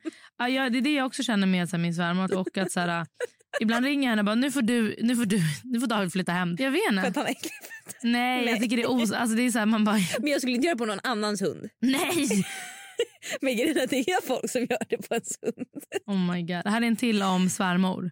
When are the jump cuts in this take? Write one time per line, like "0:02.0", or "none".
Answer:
0:02.3
0:06.6